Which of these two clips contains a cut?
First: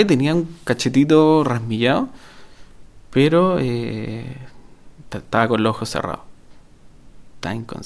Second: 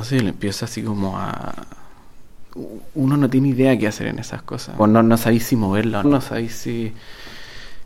second; 2 cuts; at 4.8 s, 6.0 s

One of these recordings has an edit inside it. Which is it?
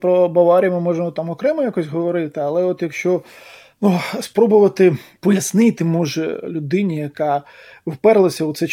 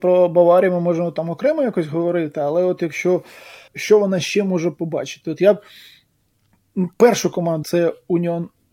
second; 2 cuts; at 3.7 s, 7.6 s

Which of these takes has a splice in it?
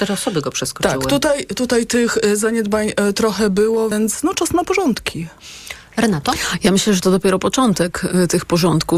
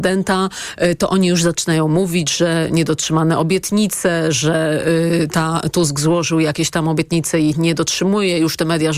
first; 1 cut; at 3.9 s

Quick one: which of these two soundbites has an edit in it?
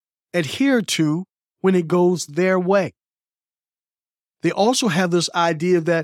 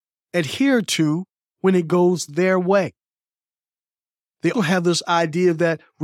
second; 1 cut; at 4.5 s

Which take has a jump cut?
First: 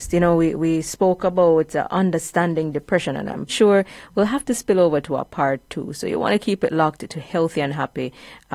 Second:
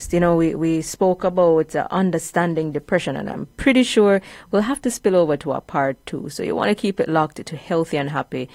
first; 1 cut; at 3.5 s

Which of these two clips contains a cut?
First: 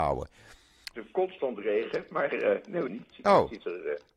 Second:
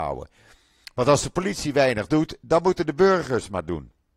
first; 2 cuts; at 0.9 s, 2.9 s

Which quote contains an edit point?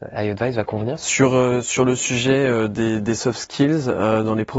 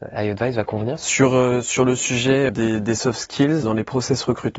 second; 2 cuts; at 2.5 s, 3.6 s

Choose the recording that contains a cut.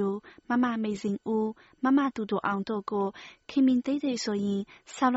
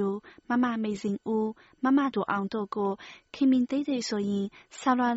second; 1 cut; at 2.1 s

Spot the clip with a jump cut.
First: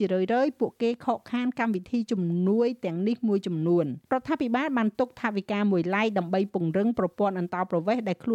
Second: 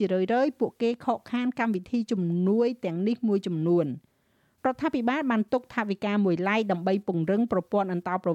first; 1 cut; at 4.0 s

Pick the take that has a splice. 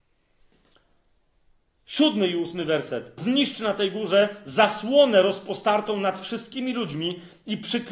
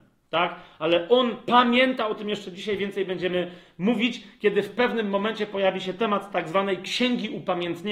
first; 1 cut; at 3.2 s

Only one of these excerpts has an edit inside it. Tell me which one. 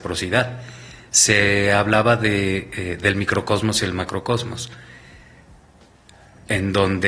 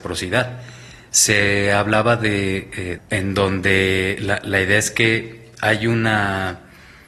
second; 1 cut; at 3.0 s

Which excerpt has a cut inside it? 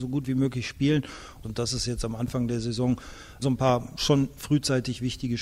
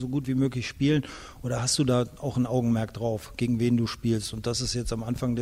first; 2 cuts; at 1.4 s, 3.4 s

